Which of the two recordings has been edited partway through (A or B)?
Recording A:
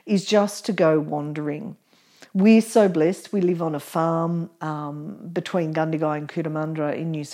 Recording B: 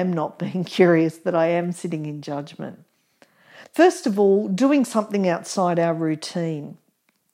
B